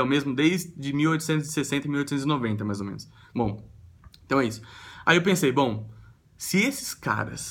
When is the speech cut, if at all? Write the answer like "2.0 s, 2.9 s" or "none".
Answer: 3.3 s